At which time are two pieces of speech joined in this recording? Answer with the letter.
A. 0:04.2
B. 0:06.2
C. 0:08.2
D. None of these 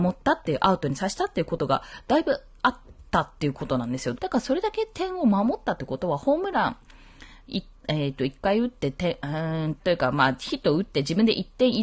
A